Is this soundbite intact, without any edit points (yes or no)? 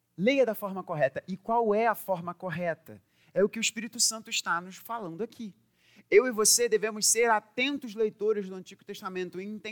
yes